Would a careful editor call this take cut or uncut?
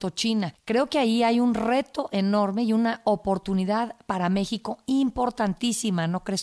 uncut